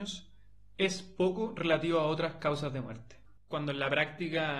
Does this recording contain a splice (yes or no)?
yes